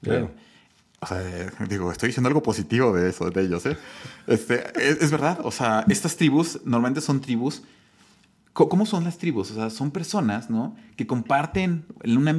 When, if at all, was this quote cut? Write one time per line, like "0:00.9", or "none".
none